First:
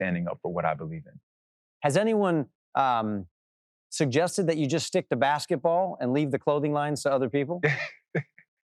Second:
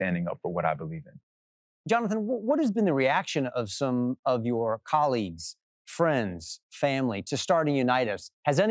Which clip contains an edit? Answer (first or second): first